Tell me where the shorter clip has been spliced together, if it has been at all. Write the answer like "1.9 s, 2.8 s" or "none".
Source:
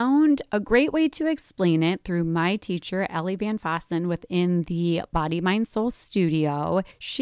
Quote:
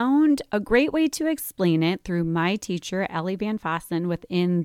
none